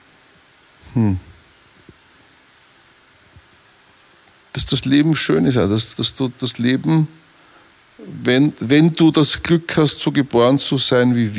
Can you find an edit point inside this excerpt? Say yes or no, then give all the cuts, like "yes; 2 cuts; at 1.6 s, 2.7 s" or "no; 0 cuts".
yes; 1 cut; at 5.9 s